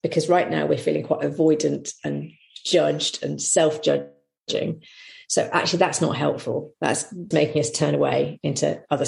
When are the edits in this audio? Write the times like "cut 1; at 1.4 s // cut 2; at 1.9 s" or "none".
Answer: cut 1; at 7.3 s